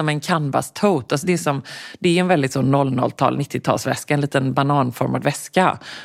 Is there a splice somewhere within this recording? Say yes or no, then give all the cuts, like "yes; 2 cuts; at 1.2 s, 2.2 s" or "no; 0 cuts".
no; 0 cuts